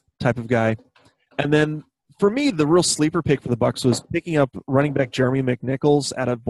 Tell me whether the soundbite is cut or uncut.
uncut